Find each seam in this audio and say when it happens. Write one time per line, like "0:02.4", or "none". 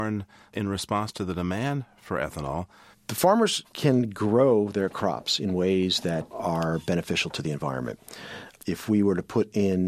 0:02.9